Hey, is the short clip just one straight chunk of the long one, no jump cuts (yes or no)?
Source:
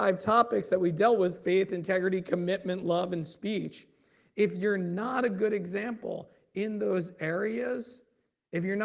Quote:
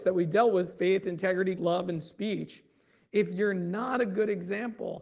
no